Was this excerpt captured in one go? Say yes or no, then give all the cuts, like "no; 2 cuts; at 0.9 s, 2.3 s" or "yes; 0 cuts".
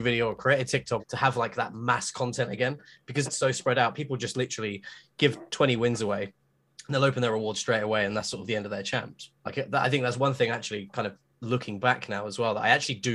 no; 3 cuts; at 1.0 s, 3.3 s, 9.4 s